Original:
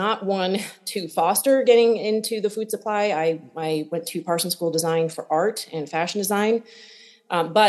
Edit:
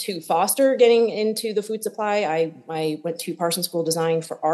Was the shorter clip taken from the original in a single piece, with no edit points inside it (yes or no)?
yes